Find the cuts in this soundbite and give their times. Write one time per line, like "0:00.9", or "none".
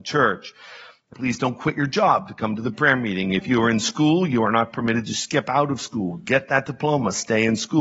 0:01.1